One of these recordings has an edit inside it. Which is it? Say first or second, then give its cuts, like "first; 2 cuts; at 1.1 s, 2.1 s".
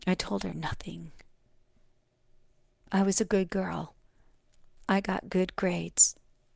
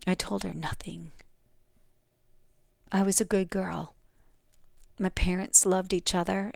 second; 1 cut; at 4.8 s